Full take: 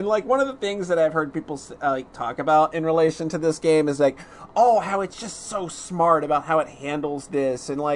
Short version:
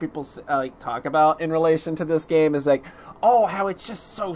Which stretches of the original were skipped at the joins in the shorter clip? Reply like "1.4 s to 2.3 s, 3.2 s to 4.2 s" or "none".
none

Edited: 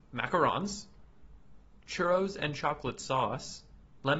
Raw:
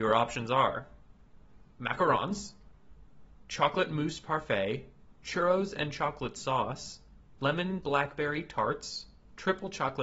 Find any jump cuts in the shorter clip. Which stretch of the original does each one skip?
3.5 s to 5.2 s

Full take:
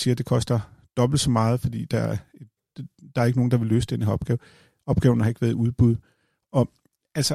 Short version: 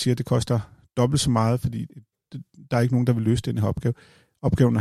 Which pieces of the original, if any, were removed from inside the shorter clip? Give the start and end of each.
1.9 s to 2.3 s

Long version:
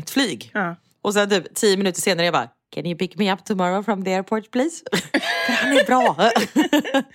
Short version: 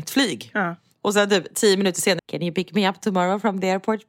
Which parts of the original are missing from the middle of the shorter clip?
2.2 s to 2.6 s

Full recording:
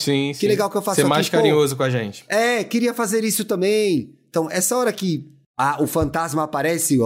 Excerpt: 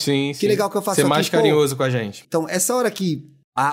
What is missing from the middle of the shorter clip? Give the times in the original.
2.2 s to 4.3 s

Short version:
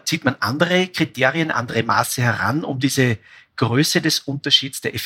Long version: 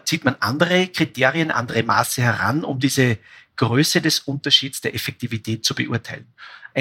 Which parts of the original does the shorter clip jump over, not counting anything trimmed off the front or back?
none

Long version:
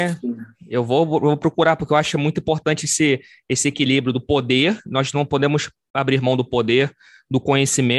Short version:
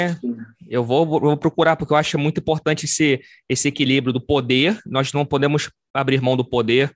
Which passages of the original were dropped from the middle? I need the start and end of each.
none

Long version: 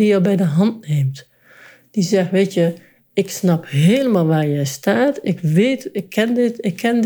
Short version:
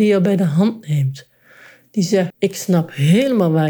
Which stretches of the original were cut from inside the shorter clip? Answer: 2.3 s to 3.0 s

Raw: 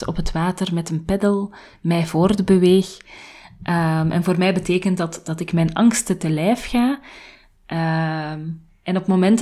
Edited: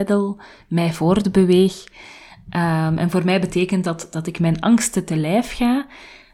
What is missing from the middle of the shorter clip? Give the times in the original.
none

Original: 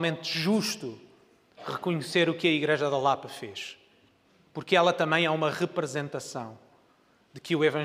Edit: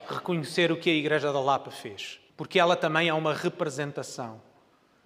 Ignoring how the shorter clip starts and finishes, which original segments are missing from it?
3.9 s to 4.5 s

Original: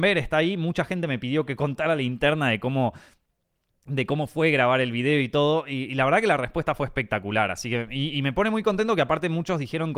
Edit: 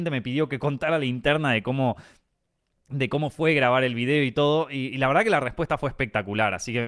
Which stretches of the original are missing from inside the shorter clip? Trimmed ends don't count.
none

